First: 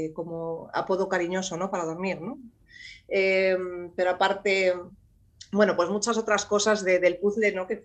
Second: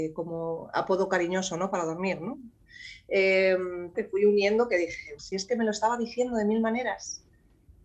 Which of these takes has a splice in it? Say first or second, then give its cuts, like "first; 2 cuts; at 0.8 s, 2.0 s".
second; 2 cuts; at 3.9 s, 5.2 s